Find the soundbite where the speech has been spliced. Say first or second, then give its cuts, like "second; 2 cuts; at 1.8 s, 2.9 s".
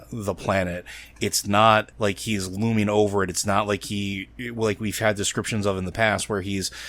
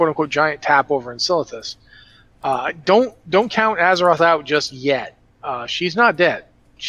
first; 1 cut; at 1.9 s